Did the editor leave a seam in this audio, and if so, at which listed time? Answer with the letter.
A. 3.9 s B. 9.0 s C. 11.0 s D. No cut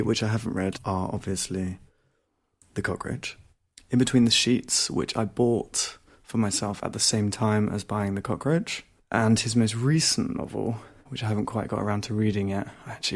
C